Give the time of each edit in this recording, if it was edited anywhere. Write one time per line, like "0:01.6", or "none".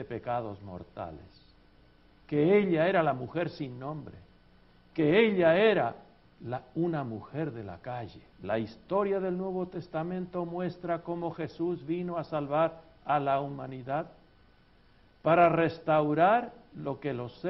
0:08.3